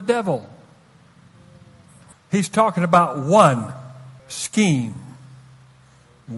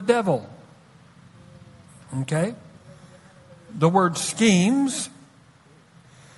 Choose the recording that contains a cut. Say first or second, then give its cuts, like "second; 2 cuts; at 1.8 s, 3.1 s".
first; 2 cuts; at 2.1 s, 4.2 s